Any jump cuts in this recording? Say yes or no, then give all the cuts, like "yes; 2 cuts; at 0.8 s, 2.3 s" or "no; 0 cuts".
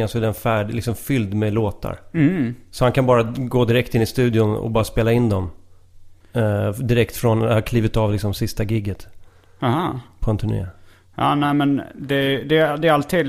no; 0 cuts